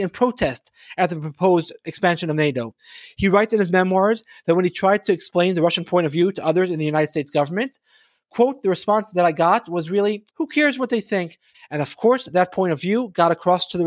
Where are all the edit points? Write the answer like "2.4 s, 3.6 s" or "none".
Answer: 10.3 s, 11.5 s